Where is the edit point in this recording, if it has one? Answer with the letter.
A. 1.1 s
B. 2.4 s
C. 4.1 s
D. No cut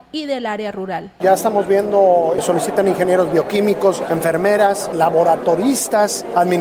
A